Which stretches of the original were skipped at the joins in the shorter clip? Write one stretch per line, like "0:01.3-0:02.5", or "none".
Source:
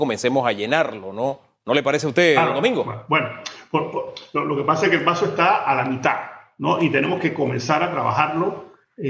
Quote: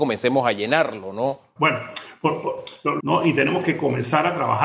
0:01.6-0:03.1
0:04.5-0:06.6